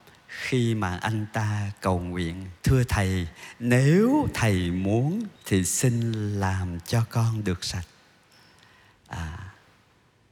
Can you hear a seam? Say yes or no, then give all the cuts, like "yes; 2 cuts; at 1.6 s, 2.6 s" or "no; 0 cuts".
yes; 2 cuts; at 2.6 s, 5.4 s